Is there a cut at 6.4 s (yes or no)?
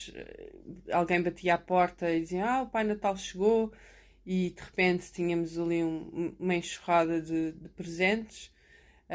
no